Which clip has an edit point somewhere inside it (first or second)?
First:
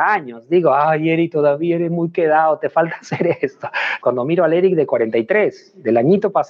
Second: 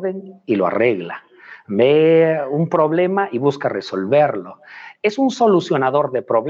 first